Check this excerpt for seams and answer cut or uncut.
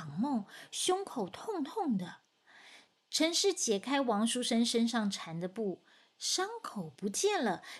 uncut